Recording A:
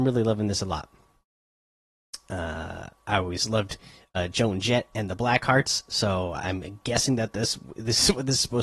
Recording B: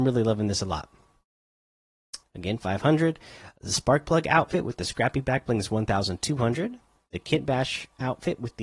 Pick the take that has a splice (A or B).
B